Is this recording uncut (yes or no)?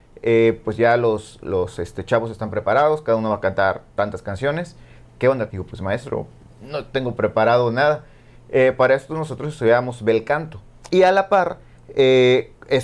no